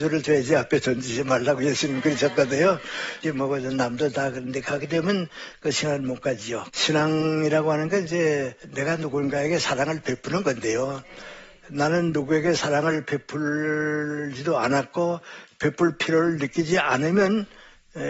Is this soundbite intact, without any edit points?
no; 3 cuts; at 3.2 s, 6.7 s, 8.6 s

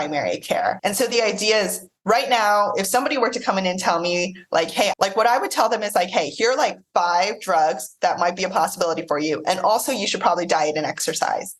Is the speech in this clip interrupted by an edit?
yes; 1 cut; at 4.9 s

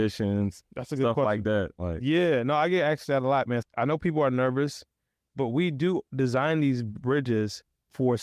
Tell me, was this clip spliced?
yes; 1 cut; at 3.6 s

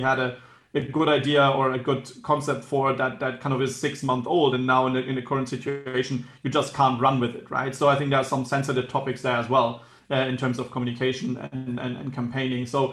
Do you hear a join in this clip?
no; 0 cuts

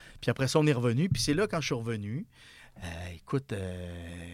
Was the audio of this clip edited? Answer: no; 0 cuts

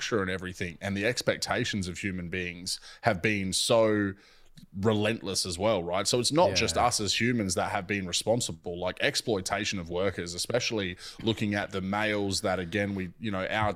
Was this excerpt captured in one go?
yes; 0 cuts

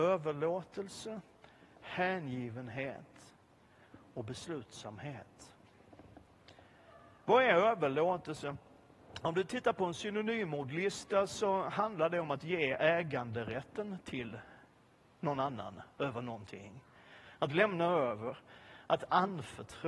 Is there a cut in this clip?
no; 0 cuts

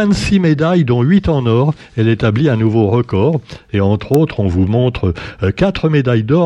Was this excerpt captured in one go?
yes; 0 cuts

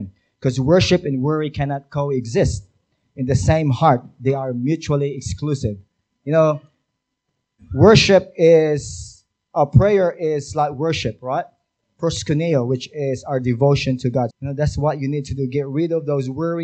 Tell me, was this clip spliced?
yes; 2 cuts; at 6.1 s, 14.3 s

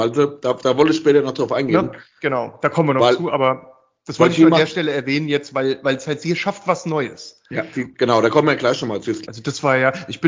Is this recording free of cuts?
no; 2 cuts; at 7.9 s, 9.3 s

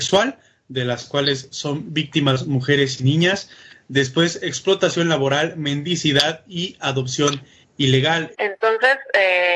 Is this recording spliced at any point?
yes; 1 cut; at 8.3 s

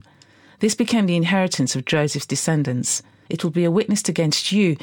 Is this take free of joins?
no; 1 cut; at 3.3 s

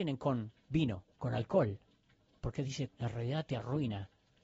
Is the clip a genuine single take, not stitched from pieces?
no; 2 cuts; at 1.1 s, 2.9 s

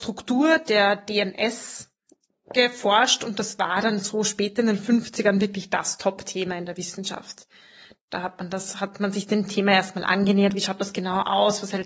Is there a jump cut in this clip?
no; 0 cuts

